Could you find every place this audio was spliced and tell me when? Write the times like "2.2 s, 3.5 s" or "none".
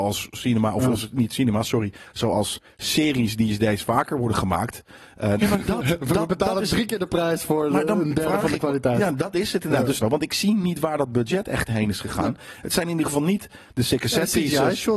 5.4 s, 10.0 s